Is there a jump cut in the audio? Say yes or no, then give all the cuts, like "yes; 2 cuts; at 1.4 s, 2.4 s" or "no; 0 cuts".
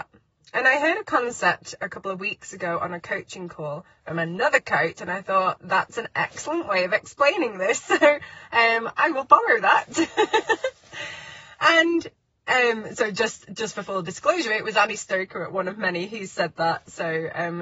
no; 0 cuts